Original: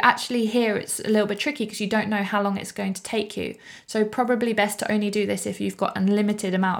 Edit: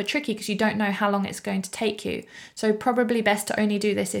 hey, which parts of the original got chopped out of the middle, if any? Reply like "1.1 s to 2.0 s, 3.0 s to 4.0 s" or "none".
none